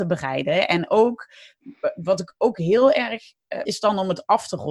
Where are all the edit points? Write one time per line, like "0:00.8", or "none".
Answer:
0:03.6